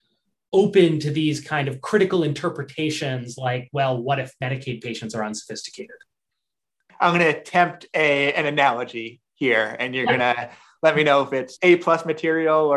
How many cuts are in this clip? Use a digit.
0